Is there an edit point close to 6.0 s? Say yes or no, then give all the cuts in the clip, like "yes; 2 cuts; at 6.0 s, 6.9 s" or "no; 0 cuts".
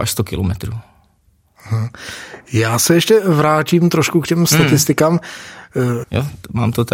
yes; 1 cut; at 6.0 s